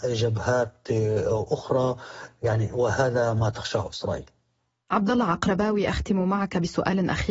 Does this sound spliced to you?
no; 0 cuts

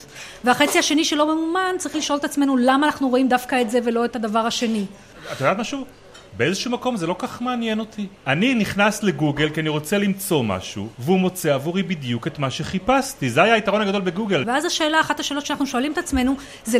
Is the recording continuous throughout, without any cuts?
no; 2 cuts; at 10.9 s, 14.4 s

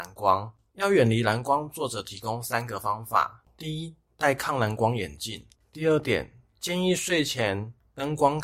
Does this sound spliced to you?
yes; 1 cut; at 5.5 s

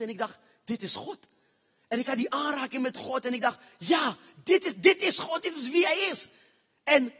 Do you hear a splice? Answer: no; 0 cuts

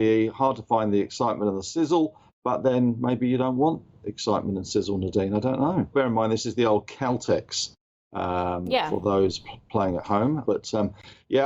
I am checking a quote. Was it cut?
yes; 2 cuts; at 5.9 s, 10.4 s

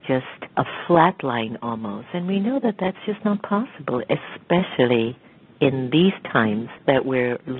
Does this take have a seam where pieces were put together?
no; 0 cuts

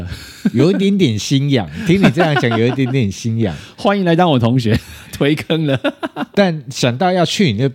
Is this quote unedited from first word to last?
yes; 0 cuts

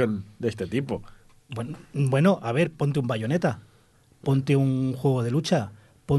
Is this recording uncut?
yes; 0 cuts

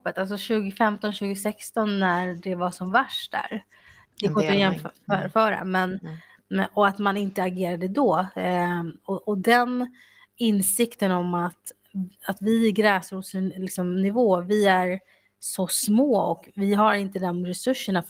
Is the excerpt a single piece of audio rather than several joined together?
no; 1 cut; at 4.0 s

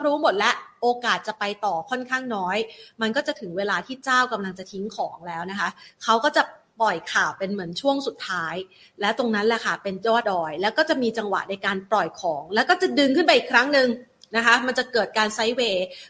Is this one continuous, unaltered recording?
no; 1 cut; at 10.2 s

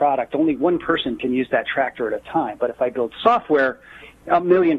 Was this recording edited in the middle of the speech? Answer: no; 0 cuts

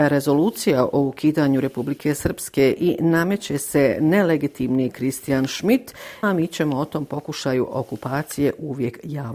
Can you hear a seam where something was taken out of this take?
yes; 1 cut; at 6.2 s

